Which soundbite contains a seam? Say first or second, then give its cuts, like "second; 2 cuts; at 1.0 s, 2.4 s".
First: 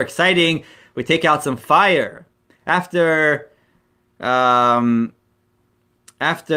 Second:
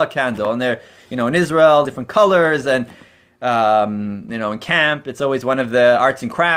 second; 1 cut; at 1.8 s